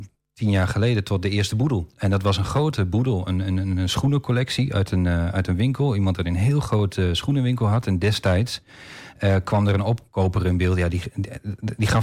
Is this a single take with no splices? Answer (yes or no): yes